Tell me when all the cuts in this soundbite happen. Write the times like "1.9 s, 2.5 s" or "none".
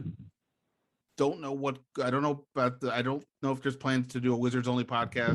none